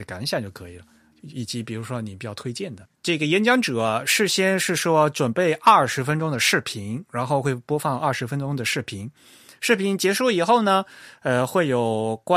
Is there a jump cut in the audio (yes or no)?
yes